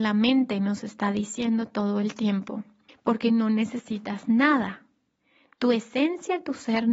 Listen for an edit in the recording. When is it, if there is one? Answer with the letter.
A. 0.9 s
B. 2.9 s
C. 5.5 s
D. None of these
B